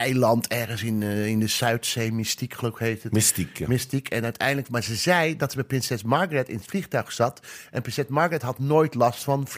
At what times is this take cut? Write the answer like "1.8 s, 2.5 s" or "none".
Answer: none